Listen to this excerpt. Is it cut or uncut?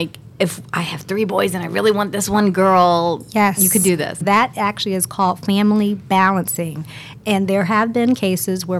cut